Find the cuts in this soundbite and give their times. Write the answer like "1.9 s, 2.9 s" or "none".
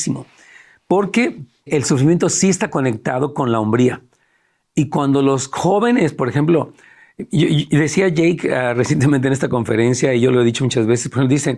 1.7 s